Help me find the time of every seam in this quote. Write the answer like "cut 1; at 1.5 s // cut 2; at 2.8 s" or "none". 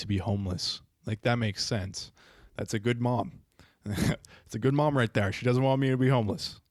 none